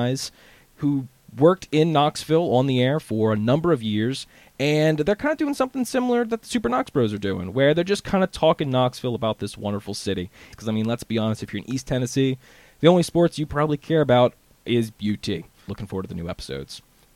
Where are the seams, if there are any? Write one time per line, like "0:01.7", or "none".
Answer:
0:10.5
0:15.7